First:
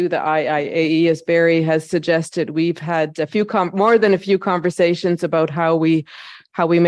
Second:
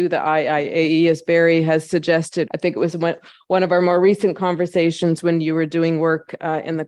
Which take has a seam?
second; 1 cut; at 2.5 s

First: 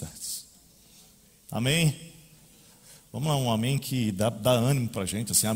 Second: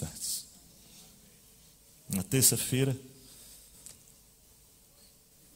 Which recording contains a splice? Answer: first; 1 cut; at 1.4 s

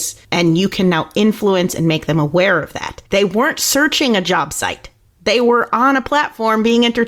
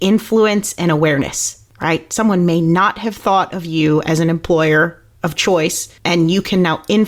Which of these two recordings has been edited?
first; 1 cut; at 3.1 s

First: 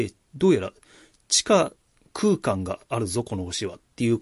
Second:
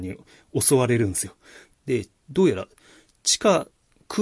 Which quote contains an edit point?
second; 1 cut; at 1.7 s

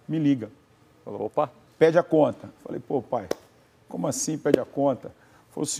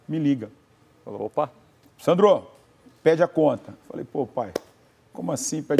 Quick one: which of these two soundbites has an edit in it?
first; 1 cut; at 1.7 s

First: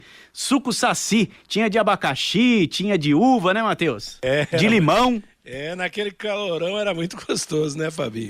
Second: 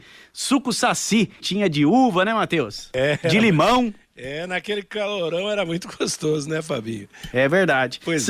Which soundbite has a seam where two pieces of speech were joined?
second; 1 cut; at 1.4 s

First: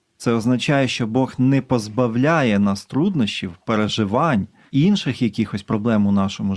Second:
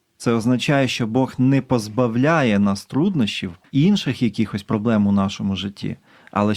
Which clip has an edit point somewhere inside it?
second; 1 cut; at 3.6 s

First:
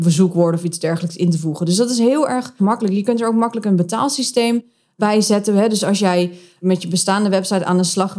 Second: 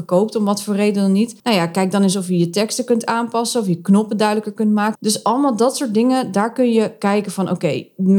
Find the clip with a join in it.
second; 2 cuts; at 1.4 s, 5.0 s

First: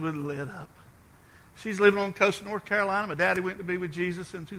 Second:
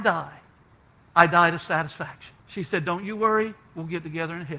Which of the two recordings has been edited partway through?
second; 1 cut; at 2.4 s

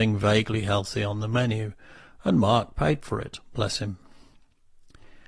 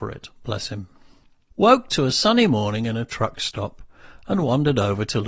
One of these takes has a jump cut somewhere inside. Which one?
second; 1 cut; at 1.5 s

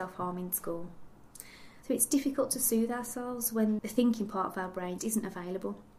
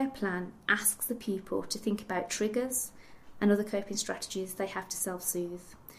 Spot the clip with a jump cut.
first; 3 cuts; at 1.8 s, 3.8 s, 5.0 s

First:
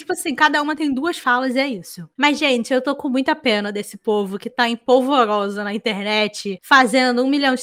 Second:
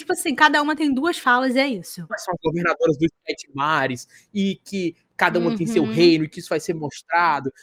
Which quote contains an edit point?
second; 1 cut; at 2.1 s

